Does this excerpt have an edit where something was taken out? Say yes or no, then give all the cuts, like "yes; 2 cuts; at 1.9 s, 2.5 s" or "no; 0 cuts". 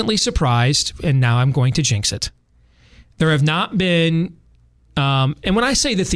no; 0 cuts